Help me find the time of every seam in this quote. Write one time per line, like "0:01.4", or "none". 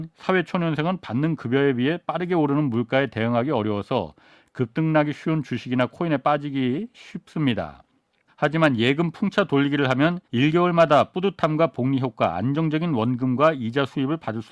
0:08.3
0:10.2